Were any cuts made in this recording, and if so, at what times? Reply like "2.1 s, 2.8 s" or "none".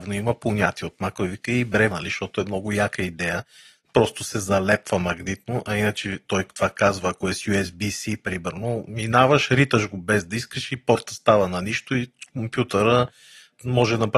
1.9 s